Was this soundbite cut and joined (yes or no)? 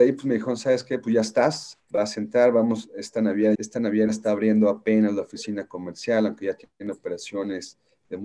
yes